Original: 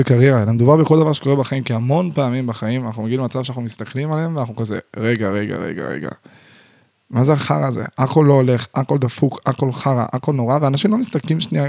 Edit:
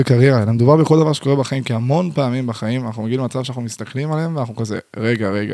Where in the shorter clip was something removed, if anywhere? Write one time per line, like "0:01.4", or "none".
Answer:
none